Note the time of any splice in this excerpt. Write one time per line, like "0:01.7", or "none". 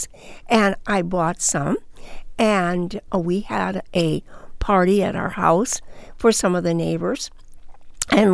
none